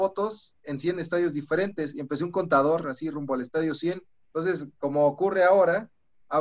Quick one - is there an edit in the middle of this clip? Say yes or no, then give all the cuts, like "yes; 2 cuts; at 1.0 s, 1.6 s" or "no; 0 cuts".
yes; 1 cut; at 4.2 s